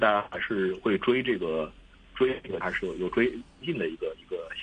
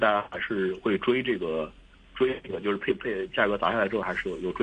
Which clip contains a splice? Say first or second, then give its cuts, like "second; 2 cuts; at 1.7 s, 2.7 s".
first; 1 cut; at 2.6 s